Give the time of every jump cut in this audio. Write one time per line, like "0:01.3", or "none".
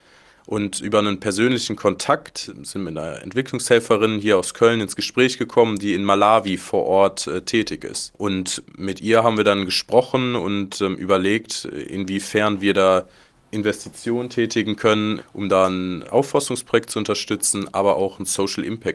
0:08.1
0:15.2